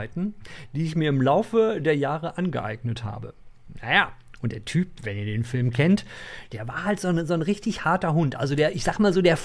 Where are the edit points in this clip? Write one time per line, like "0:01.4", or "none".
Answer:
none